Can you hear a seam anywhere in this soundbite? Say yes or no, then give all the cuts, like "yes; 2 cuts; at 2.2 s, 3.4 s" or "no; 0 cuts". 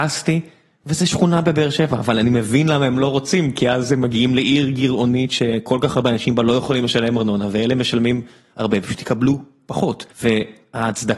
yes; 1 cut; at 10.1 s